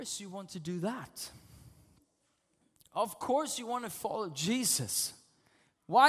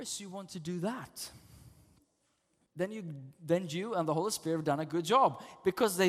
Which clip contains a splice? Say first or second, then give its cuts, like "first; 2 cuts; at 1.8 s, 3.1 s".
second; 1 cut; at 2.7 s